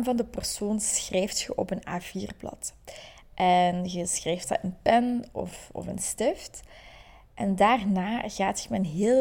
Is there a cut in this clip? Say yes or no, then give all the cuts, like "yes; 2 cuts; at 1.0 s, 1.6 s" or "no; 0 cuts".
no; 0 cuts